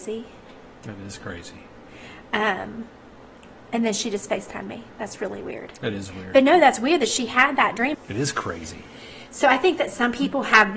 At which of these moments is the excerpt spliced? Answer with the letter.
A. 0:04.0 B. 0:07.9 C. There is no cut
B